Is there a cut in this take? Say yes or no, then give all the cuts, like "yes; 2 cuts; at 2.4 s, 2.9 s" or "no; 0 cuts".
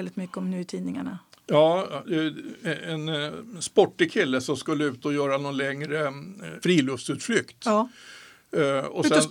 no; 0 cuts